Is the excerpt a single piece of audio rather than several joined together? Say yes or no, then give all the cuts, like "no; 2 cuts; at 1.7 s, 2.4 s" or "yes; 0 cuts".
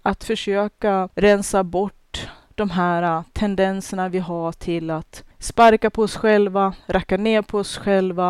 no; 1 cut; at 5.3 s